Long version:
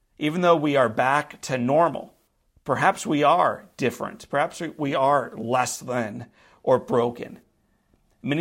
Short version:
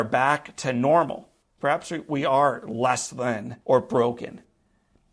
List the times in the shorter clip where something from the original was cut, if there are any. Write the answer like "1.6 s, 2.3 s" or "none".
1.6 s, 3.6 s